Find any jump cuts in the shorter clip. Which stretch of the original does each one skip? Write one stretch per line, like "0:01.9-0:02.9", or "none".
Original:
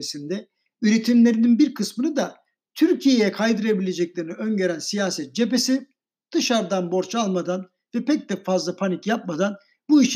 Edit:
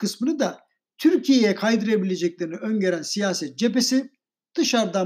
none